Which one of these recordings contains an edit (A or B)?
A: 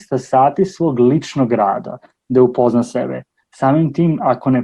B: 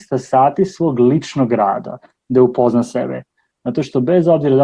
A